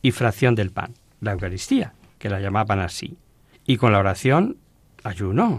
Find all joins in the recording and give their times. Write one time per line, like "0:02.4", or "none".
0:03.5